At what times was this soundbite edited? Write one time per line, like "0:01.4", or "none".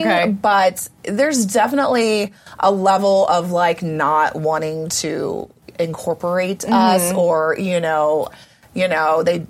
0:08.3